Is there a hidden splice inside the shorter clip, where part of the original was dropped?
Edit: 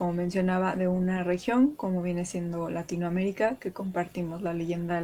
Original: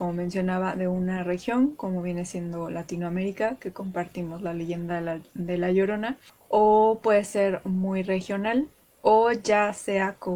no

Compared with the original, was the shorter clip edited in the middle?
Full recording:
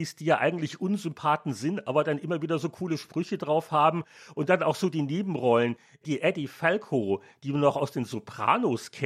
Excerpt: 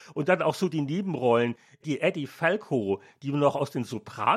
no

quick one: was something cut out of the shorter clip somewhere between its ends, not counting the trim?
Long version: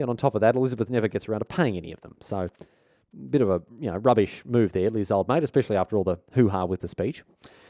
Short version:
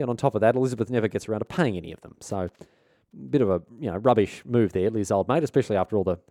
no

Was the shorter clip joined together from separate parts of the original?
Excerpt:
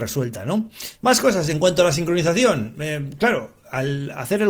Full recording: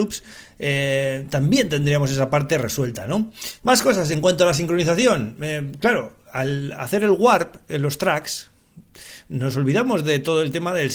no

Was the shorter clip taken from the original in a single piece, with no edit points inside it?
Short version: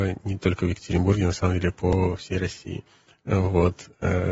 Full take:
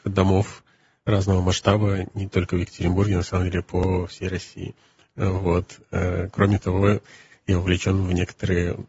yes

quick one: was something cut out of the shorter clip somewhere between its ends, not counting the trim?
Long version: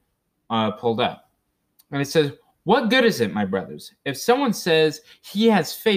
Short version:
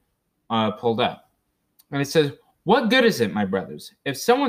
no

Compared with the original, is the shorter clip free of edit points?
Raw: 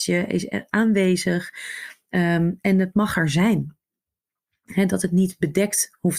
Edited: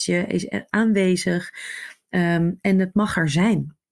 yes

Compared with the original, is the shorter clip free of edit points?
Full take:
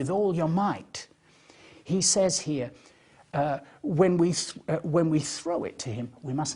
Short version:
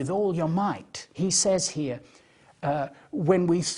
no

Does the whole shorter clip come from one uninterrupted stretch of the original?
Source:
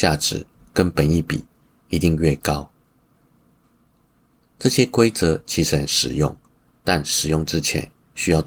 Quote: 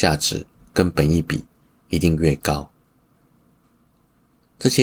yes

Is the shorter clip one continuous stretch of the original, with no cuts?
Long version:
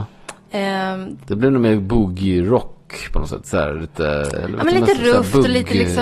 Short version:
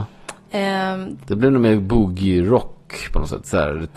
yes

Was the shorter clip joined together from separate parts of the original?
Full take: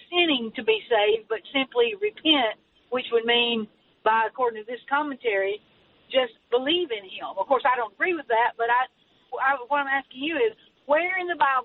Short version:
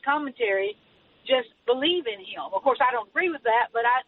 no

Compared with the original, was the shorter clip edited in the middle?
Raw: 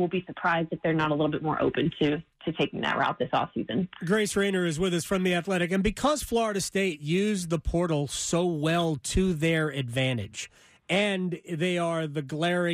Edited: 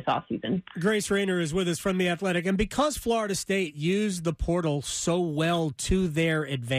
no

